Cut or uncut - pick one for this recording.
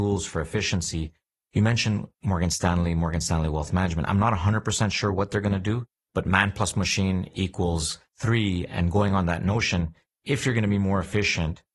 uncut